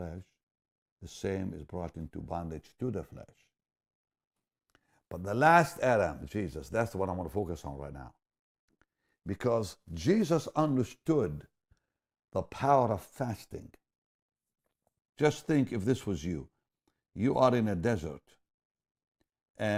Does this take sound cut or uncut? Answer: cut